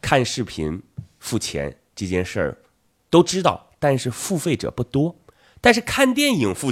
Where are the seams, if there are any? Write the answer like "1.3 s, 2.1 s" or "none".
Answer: none